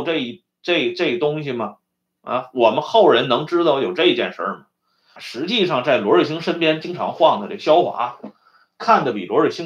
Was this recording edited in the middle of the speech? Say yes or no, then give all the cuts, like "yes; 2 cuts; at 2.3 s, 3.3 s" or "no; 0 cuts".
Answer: yes; 1 cut; at 5.2 s